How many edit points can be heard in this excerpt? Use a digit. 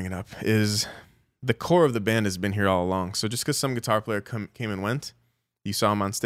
0